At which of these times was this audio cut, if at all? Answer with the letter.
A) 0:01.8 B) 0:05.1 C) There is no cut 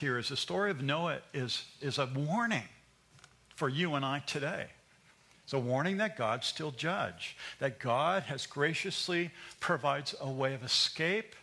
A